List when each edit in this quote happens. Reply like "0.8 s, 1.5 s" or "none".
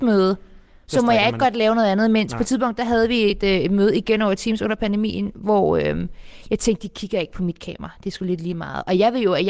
none